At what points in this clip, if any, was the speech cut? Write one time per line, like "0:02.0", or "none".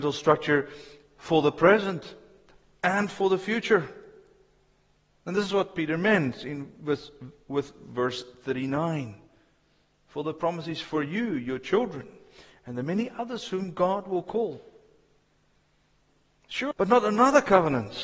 0:16.7